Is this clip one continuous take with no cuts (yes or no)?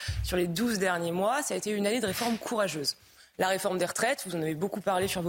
yes